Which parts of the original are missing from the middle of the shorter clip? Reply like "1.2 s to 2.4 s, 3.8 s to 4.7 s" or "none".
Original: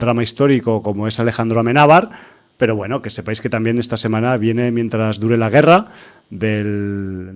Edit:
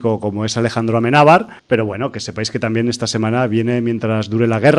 2.2 s to 2.5 s